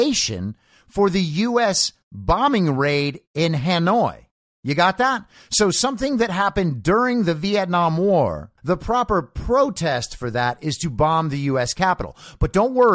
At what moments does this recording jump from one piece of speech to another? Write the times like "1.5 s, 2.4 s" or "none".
8.6 s